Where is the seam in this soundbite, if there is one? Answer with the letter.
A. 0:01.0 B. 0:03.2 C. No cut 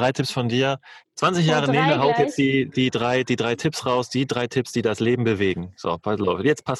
A